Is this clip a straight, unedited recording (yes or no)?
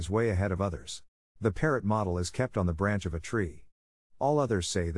no